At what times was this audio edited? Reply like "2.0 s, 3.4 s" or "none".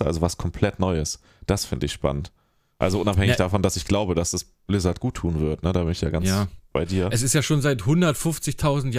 none